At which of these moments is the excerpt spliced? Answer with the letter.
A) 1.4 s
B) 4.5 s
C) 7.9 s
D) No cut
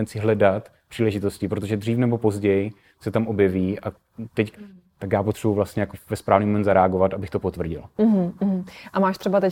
B